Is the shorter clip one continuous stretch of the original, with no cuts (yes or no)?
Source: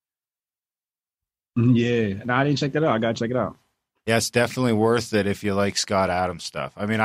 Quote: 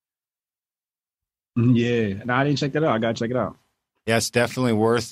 yes